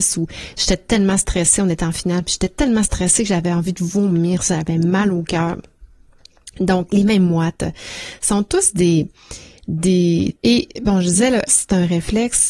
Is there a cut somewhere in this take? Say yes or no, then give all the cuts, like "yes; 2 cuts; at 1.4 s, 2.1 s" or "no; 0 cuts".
yes; 2 cuts; at 10.4 s, 11.5 s